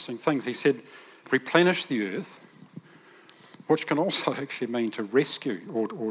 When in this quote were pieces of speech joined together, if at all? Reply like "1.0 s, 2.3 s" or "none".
1.2 s